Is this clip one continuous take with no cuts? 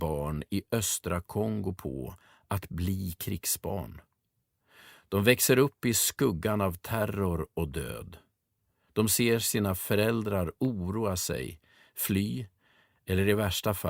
yes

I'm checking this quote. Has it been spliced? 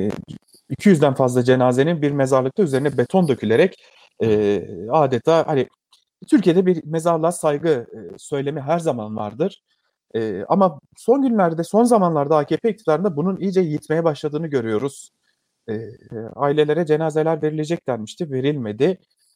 yes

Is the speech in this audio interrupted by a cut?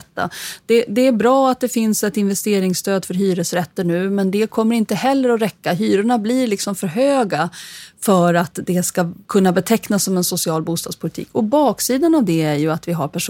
no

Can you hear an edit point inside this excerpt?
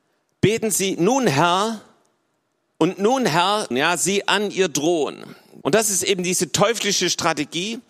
yes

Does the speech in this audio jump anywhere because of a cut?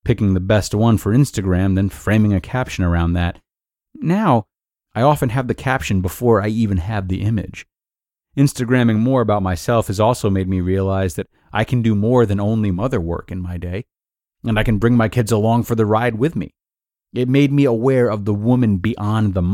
no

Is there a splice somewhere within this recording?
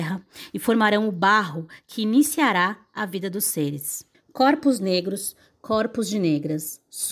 yes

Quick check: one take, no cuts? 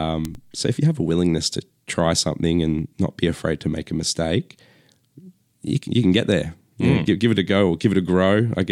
yes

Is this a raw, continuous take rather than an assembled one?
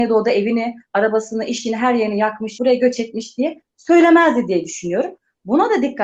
no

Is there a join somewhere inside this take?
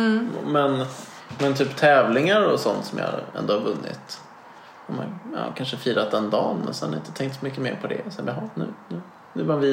no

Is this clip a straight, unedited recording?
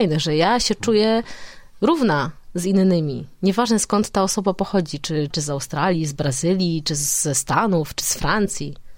no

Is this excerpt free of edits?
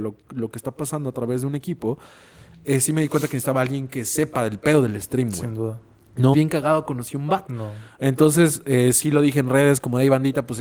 no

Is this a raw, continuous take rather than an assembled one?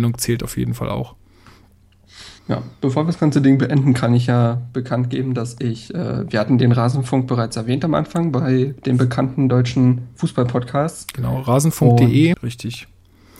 no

